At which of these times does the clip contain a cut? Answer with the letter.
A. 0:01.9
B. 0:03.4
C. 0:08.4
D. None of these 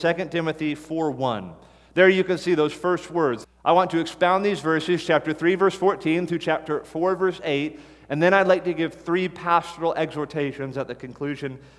B